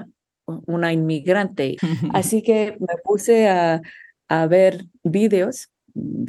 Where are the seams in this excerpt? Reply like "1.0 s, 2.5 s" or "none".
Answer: 1.8 s